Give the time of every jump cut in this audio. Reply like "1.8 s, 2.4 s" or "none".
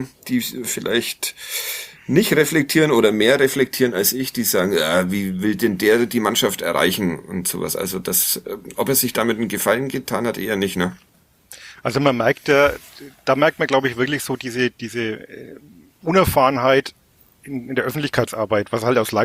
none

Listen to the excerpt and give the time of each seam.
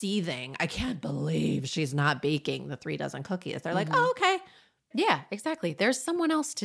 4.9 s

